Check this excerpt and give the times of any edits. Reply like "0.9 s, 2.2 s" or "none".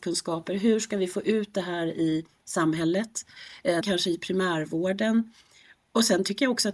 3.8 s